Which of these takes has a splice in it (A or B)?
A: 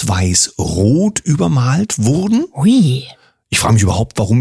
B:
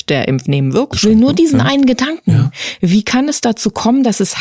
B